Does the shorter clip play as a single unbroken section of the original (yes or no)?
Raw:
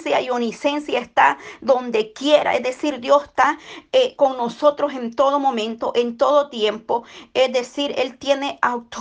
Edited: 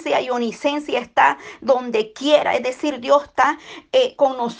yes